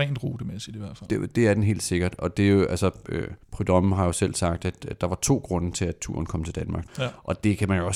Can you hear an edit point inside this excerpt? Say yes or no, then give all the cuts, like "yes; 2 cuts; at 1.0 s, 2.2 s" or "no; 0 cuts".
yes; 2 cuts; at 3.4 s, 6.9 s